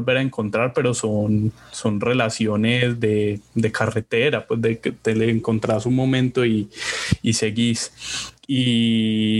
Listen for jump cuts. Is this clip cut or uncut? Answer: cut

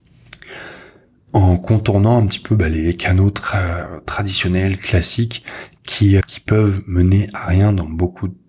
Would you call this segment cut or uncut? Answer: cut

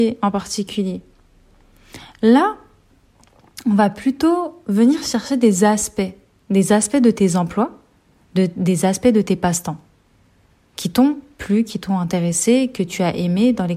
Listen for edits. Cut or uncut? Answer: uncut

